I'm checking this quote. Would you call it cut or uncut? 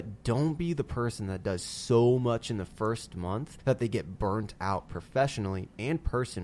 uncut